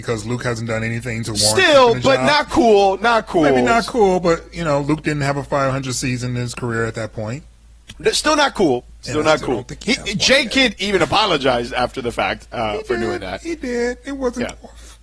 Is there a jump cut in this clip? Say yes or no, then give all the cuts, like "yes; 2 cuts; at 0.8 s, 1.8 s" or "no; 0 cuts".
no; 0 cuts